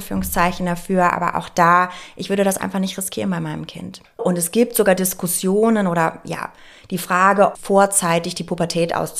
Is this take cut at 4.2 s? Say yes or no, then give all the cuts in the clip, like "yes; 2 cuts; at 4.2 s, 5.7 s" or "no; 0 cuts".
yes; 2 cuts; at 4.2 s, 7.5 s